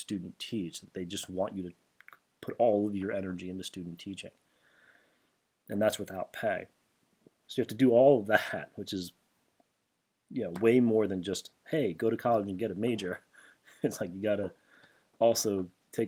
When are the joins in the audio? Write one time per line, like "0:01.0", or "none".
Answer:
0:07.4